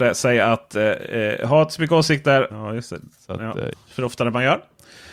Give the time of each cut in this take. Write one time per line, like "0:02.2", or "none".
0:02.5
0:03.7